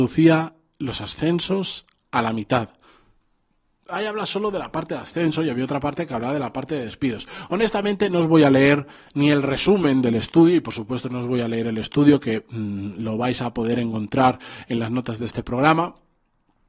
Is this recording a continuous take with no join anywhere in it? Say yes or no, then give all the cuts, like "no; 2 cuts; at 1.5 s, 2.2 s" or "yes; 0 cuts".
yes; 0 cuts